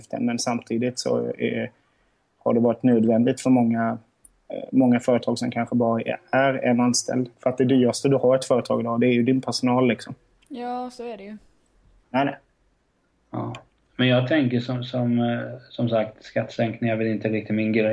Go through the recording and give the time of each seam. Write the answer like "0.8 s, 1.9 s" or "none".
7.3 s, 12.0 s